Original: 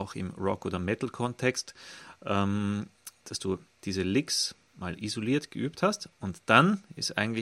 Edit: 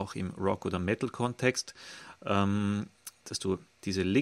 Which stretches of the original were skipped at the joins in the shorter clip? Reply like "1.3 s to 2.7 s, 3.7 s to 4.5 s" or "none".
none